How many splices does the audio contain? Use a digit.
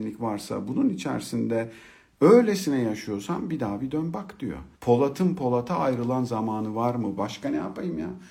2